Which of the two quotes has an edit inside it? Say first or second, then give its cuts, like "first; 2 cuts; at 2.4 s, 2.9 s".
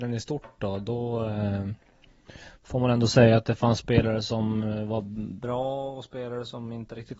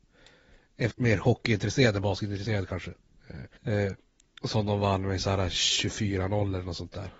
second; 2 cuts; at 0.9 s, 3.6 s